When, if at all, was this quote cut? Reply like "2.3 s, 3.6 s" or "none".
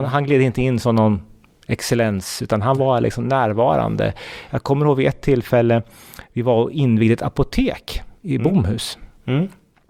none